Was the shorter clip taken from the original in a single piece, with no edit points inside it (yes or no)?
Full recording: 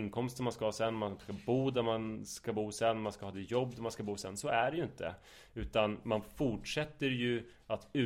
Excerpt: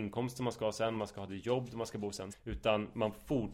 no